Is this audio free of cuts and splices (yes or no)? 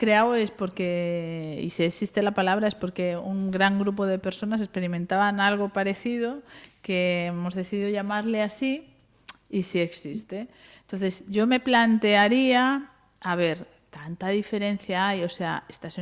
yes